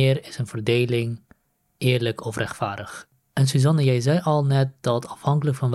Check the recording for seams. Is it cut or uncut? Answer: uncut